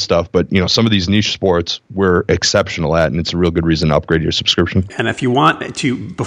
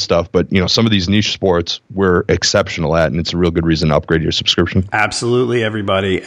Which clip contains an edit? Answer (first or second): first